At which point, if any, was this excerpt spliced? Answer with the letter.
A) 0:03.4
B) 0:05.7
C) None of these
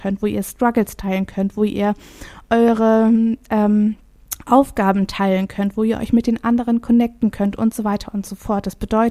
C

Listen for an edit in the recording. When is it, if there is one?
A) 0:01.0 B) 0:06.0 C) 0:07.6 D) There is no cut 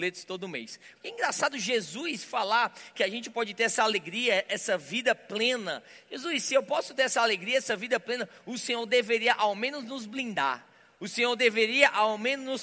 A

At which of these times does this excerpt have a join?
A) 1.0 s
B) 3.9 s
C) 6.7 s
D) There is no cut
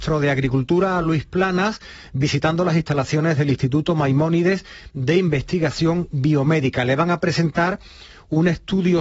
D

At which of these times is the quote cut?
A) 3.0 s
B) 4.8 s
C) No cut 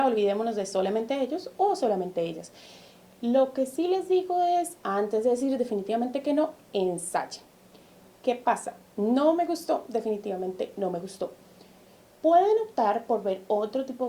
A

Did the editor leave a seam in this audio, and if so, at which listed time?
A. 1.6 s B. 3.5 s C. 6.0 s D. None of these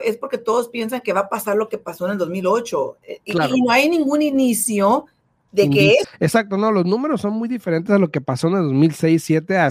C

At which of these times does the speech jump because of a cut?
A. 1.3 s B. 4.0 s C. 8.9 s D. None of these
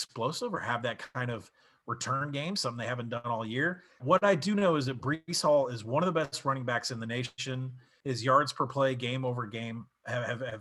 B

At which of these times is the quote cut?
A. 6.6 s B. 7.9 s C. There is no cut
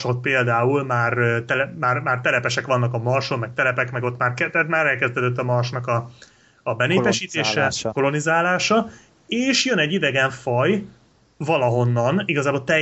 C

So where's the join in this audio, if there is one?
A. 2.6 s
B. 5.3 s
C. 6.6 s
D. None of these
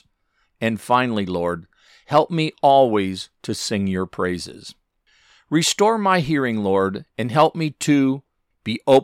D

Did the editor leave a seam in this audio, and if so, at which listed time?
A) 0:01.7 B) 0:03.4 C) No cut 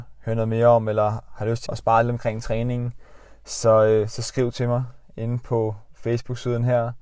A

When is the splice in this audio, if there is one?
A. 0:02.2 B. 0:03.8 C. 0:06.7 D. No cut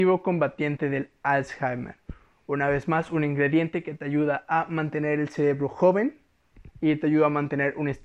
D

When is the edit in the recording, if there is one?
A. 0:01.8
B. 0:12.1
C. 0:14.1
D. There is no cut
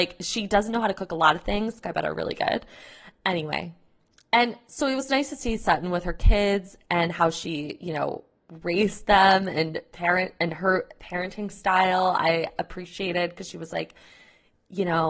A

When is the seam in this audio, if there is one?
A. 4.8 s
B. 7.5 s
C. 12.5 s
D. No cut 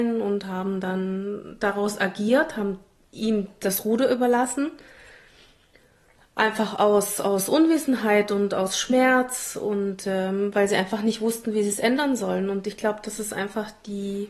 D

